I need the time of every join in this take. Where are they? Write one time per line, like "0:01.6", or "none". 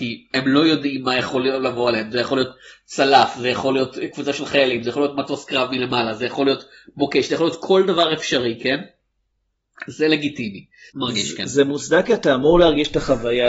0:10.9